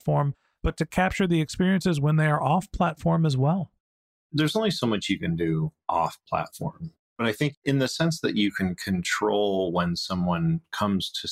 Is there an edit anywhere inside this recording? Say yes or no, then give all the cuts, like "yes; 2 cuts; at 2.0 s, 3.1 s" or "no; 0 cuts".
no; 0 cuts